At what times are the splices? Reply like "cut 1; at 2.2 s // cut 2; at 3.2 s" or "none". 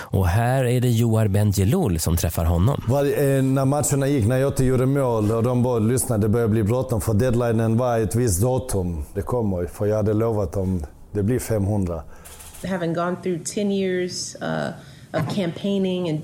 cut 1; at 9.1 s // cut 2; at 12.6 s